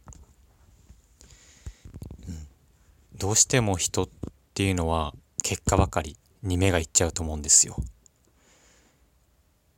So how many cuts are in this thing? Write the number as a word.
zero